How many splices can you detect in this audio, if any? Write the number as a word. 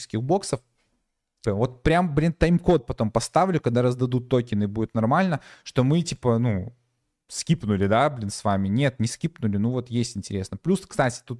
one